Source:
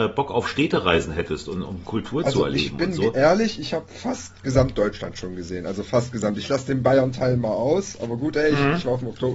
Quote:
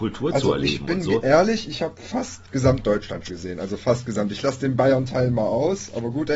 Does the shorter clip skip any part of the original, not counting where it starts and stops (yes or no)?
yes